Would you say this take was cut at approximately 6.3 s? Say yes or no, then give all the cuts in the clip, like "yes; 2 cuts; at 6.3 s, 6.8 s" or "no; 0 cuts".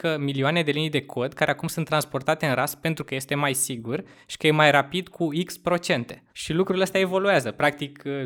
yes; 1 cut; at 6.3 s